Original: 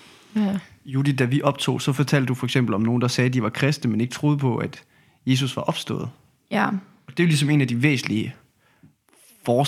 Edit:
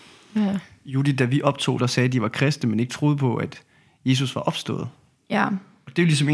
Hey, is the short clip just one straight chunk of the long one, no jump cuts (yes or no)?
no